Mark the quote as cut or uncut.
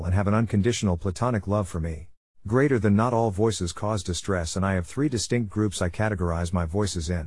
cut